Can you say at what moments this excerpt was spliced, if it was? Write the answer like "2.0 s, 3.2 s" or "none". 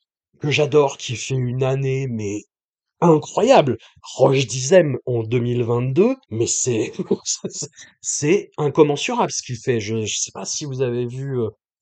6.2 s